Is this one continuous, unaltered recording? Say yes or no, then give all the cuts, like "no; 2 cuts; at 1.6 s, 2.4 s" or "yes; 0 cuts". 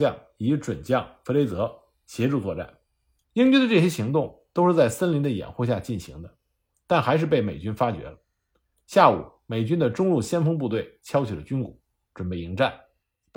no; 1 cut; at 3.2 s